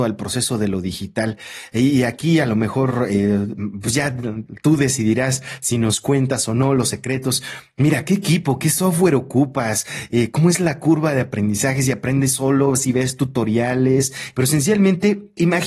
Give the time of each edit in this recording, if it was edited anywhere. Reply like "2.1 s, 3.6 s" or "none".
14.3 s